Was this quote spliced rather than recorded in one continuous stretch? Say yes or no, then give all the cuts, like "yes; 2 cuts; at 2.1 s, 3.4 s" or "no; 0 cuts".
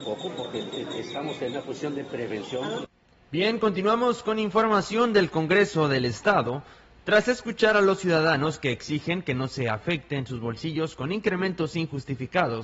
no; 0 cuts